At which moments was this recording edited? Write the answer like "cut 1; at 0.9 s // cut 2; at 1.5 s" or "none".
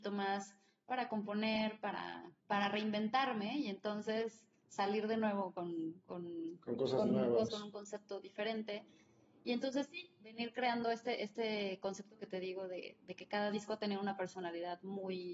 cut 1; at 2.4 s // cut 2; at 7.5 s